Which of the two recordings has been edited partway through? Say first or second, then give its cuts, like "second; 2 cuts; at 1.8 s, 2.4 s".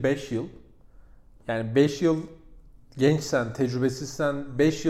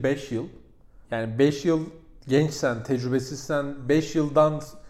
second; 2 cuts; at 1.0 s, 2.2 s